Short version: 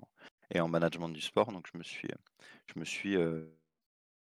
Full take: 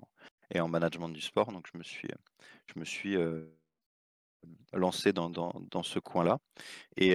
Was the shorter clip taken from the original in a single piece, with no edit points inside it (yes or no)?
yes